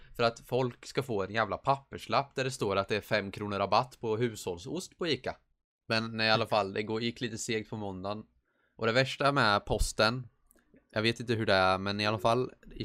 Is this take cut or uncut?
cut